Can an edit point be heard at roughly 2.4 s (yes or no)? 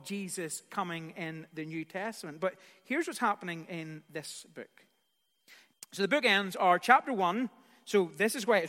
no